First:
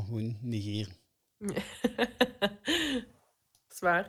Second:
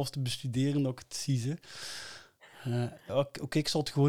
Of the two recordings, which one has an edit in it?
second; 1 cut; at 3.1 s

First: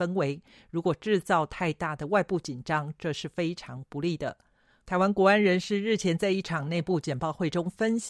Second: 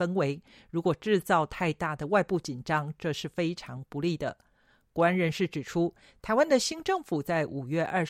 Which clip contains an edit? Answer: first; 1 cut; at 4.8 s

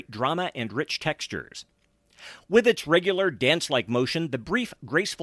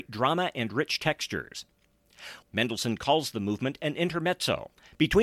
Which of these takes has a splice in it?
second; 1 cut; at 2.4 s

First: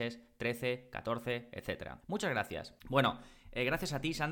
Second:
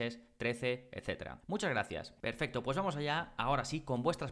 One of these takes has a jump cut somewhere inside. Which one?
second; 2 cuts; at 0.9 s, 2.2 s

